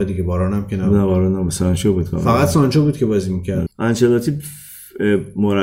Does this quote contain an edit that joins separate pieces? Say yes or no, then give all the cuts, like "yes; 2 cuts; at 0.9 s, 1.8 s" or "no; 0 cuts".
yes; 1 cut; at 3.7 s